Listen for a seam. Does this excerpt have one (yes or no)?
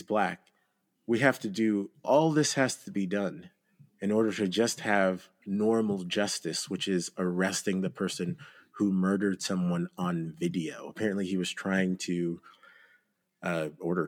yes